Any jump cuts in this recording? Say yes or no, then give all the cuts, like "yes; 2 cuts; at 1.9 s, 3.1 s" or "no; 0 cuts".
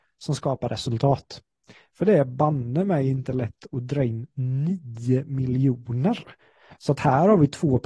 no; 0 cuts